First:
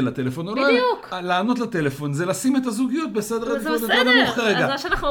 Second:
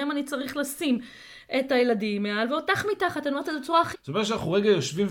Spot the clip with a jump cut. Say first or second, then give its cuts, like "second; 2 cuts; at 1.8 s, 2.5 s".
second; 1 cut; at 3.9 s